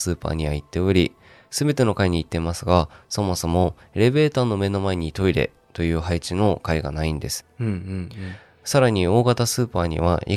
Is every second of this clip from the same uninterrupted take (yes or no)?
no